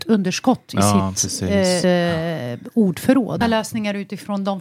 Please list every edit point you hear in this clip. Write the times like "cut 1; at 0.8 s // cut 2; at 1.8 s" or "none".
cut 1; at 1.8 s // cut 2; at 3.4 s